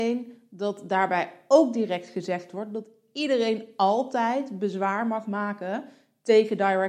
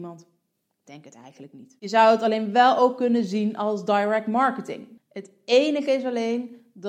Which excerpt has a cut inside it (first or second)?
second